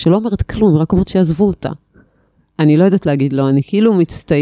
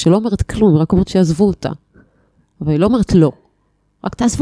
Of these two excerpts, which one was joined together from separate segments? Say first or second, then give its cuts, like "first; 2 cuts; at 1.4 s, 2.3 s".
first; 1 cut; at 2.5 s